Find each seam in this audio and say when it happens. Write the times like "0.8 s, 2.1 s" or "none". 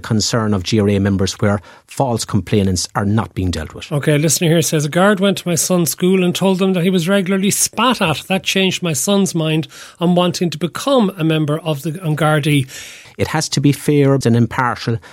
13.1 s, 14.2 s